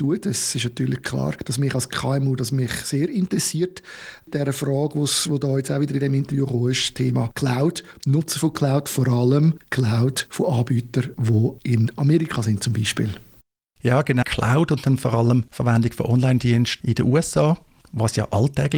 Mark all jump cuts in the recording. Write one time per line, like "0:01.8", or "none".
0:14.2

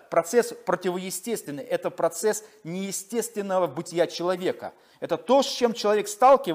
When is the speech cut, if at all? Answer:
none

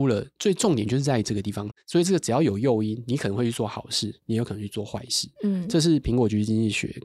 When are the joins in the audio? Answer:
0:01.7

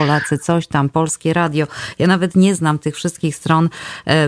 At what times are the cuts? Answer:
none

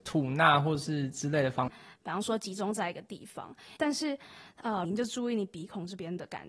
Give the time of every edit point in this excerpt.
0:01.7
0:03.8
0:04.8

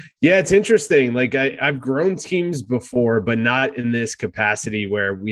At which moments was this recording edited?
none

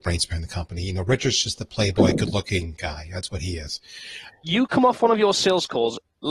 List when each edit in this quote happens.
0:04.3

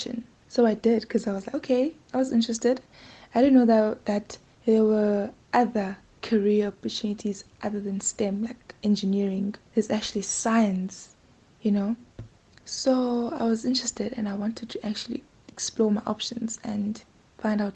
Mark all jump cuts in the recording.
none

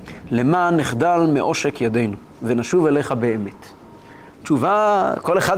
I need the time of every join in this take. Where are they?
0:04.3

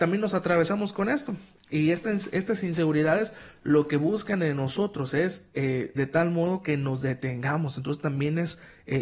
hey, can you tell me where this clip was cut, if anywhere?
0:06.0

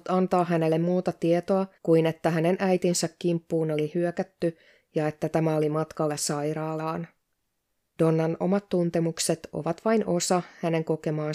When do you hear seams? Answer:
0:01.7
0:08.0

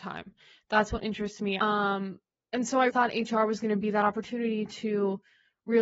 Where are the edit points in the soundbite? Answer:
0:01.6
0:02.9

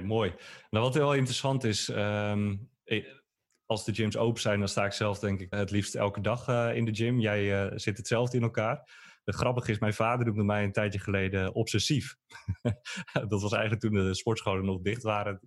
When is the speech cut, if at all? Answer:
0:05.5

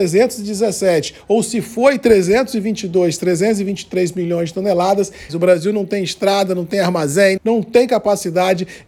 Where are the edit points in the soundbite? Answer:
0:05.3
0:07.4

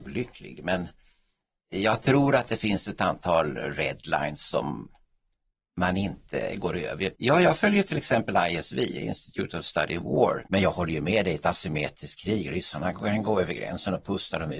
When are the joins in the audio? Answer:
0:07.1
0:10.5

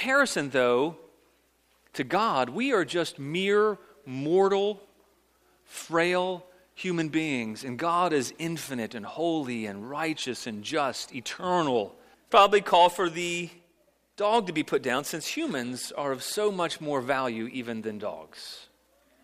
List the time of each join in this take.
0:12.1

